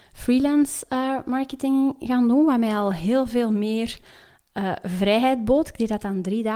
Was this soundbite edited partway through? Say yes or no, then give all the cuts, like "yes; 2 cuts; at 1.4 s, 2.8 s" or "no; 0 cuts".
no; 0 cuts